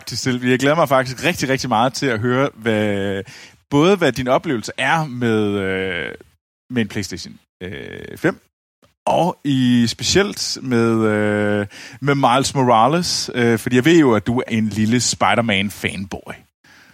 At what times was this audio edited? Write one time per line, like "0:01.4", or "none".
0:14.5